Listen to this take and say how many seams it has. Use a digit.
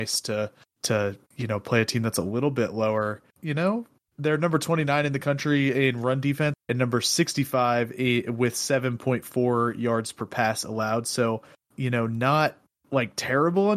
2